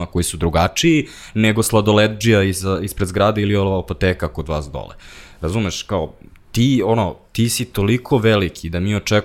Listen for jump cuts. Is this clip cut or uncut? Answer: uncut